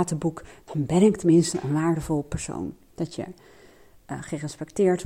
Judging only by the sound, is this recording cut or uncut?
cut